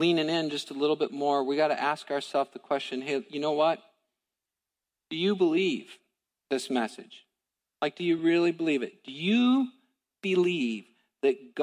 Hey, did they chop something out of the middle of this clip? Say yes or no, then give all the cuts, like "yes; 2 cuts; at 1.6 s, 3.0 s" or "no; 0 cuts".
no; 0 cuts